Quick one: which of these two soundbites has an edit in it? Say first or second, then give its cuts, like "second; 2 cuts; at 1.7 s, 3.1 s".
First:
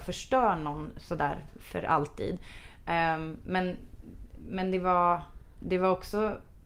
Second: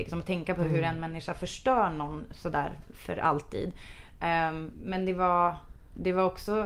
second; 1 cut; at 4.7 s